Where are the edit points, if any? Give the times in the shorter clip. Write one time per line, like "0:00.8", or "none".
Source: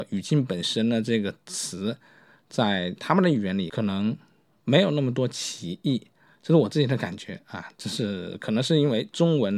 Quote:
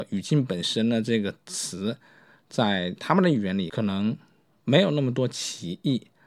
none

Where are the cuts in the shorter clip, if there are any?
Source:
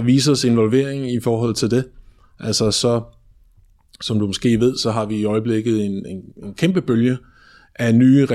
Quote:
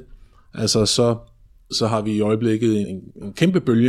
0:01.7
0:02.8

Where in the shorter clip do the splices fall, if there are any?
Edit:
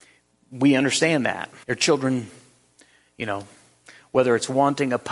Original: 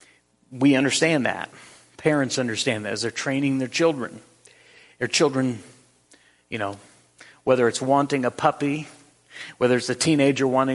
0:01.6

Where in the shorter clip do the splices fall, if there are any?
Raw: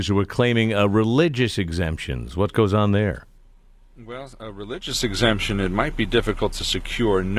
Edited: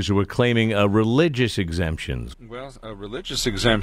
0:02.3

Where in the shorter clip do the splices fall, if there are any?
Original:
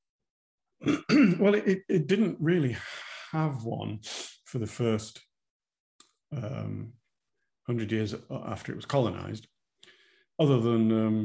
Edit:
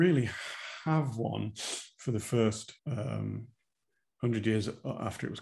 0:02.8

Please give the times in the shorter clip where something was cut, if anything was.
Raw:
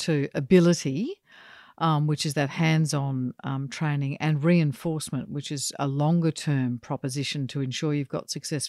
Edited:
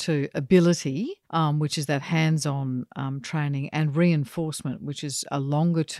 0:01.2

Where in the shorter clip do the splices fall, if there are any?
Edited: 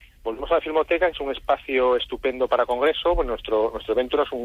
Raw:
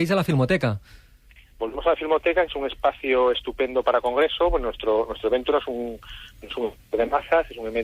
none

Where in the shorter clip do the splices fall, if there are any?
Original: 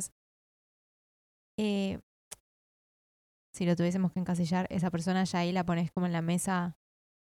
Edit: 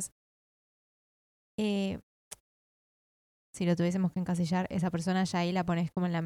none

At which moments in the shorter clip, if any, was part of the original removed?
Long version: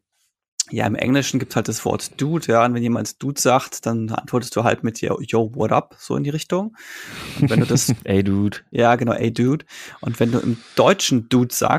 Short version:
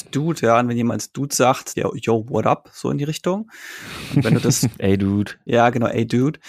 0:01.7

